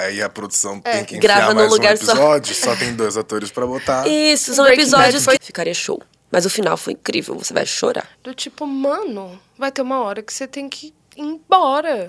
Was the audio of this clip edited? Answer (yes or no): yes